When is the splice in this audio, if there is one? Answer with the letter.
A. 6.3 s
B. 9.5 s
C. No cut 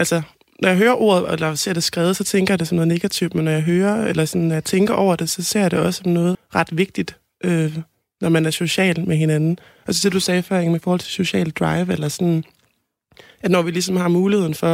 A